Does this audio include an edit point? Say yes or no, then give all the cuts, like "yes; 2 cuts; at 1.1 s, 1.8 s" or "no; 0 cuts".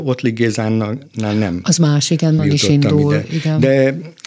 yes; 1 cut; at 2.4 s